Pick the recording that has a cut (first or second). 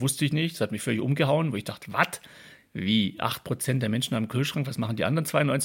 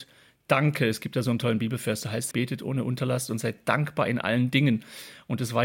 second